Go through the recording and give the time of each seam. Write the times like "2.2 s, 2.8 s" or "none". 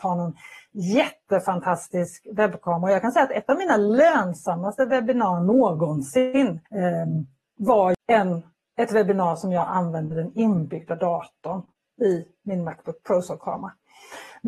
6.7 s, 8.0 s